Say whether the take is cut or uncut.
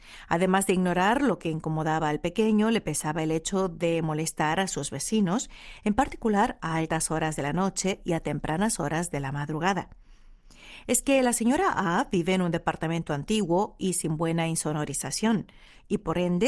uncut